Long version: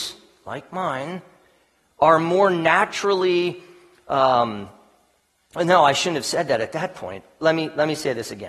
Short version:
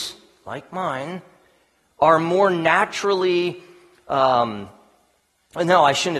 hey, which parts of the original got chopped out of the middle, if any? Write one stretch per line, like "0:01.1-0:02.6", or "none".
none

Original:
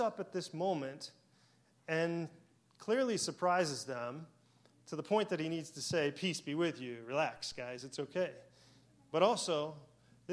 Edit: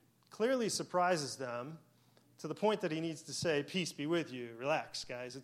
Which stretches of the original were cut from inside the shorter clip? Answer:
none

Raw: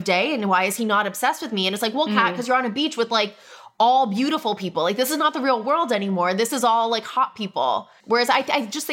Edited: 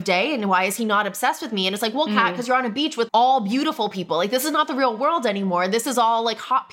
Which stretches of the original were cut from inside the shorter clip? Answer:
0:03.1-0:03.7

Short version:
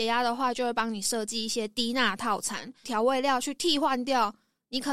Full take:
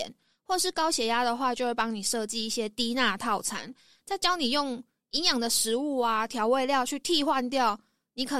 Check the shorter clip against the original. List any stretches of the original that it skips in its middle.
0:03.8-0:06.3

